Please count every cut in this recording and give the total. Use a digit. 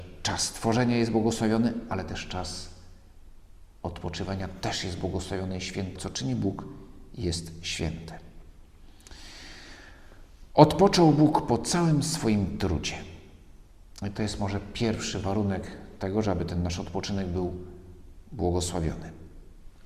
1